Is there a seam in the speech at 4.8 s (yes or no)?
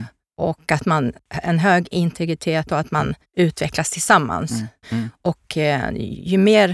yes